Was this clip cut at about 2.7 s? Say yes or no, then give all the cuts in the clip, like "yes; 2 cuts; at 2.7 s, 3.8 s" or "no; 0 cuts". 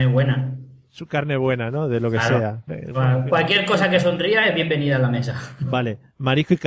yes; 1 cut; at 2.7 s